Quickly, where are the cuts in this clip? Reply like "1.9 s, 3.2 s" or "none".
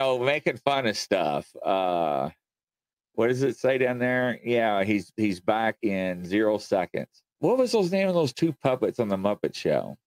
7.3 s